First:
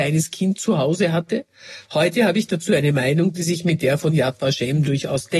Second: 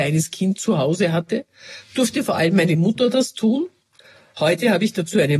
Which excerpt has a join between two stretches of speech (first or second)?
first